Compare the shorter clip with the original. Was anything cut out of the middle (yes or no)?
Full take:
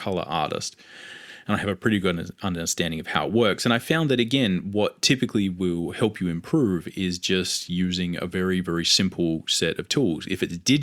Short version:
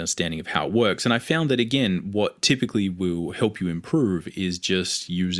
no